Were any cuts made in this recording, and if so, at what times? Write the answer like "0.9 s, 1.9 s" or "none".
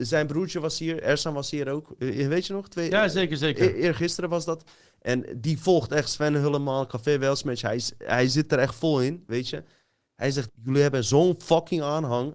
10.5 s